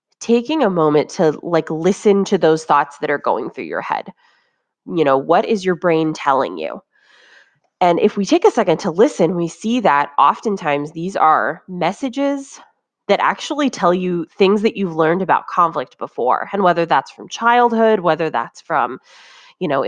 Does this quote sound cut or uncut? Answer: uncut